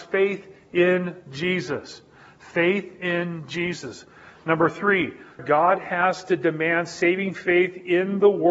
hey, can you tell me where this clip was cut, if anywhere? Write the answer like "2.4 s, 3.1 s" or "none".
5.4 s